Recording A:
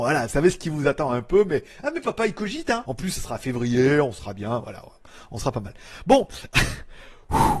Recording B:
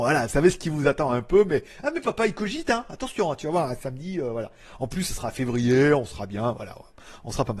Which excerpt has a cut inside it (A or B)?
A